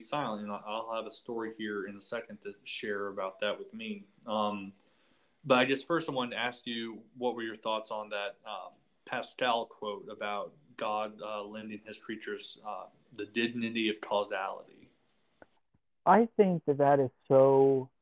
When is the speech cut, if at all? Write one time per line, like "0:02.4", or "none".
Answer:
none